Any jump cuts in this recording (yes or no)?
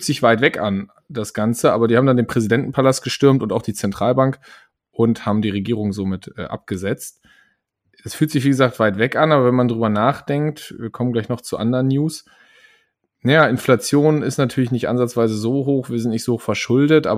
no